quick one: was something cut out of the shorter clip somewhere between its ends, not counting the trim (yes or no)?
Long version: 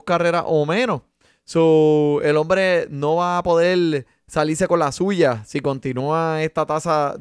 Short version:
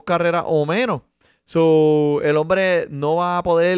no